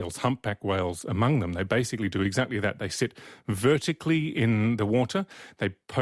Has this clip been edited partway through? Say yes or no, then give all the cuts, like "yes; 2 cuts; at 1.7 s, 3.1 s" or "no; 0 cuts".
no; 0 cuts